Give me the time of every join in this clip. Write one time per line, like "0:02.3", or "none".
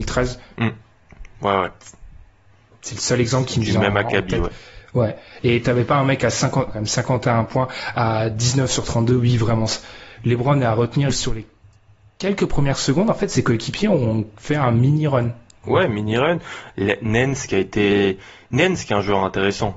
0:06.7
0:11.1